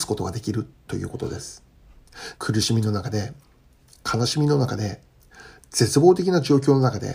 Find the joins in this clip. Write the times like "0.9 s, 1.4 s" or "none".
2.3 s